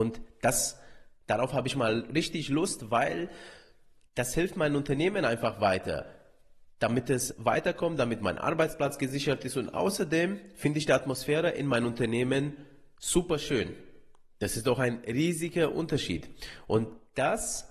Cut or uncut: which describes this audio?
uncut